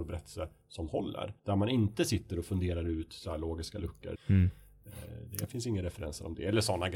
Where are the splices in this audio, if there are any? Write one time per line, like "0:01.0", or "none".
0:01.4
0:04.2